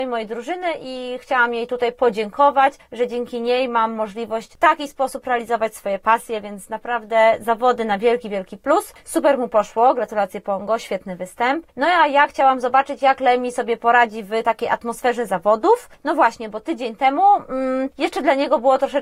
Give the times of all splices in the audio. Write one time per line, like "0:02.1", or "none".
0:09.0